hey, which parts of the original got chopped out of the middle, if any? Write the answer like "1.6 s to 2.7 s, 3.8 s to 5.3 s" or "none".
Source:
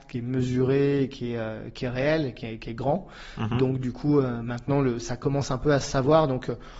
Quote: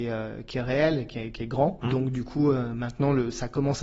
3.1 s to 3.5 s